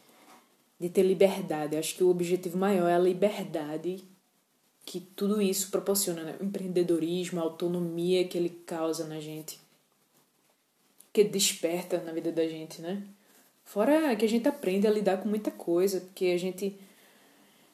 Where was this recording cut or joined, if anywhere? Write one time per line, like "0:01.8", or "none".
none